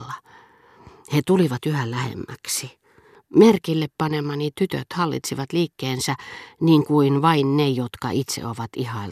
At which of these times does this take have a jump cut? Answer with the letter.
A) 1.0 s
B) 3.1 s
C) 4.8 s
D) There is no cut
B